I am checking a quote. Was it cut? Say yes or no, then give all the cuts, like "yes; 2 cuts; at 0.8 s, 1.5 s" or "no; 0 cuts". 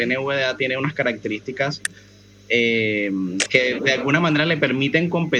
no; 0 cuts